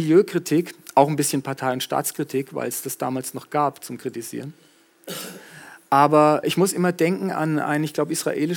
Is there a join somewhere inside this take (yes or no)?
yes